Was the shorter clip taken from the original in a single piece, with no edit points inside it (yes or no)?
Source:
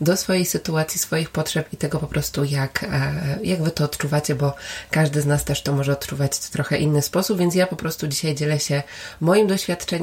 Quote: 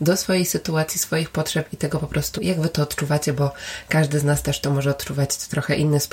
no